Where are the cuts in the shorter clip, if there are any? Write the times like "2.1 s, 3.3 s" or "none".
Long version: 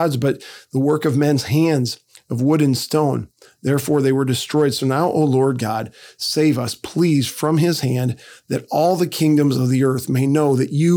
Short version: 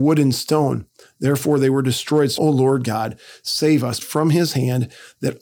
2.4 s, 4.0 s